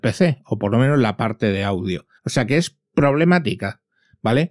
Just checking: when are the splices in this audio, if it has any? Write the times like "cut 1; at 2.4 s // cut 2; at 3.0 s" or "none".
cut 1; at 2.2 s